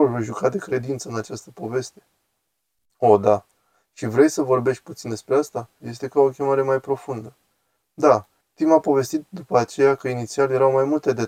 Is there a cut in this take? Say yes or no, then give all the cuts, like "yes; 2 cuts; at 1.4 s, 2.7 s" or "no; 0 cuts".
yes; 2 cuts; at 5.8 s, 8.4 s